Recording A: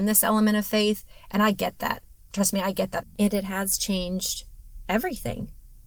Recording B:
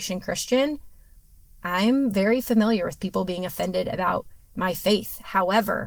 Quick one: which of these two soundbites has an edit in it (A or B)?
A